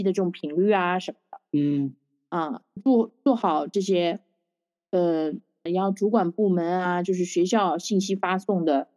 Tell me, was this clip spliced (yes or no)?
yes